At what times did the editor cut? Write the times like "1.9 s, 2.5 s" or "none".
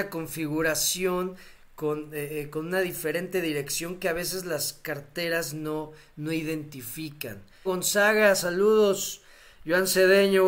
7.7 s